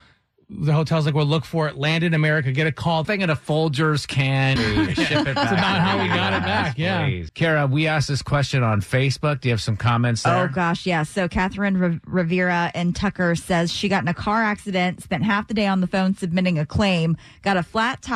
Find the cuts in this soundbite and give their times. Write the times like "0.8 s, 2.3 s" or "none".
3.0 s, 4.6 s, 7.3 s